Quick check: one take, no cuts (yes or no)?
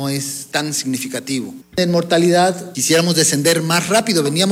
no